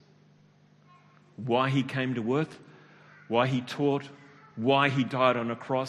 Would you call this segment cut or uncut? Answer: uncut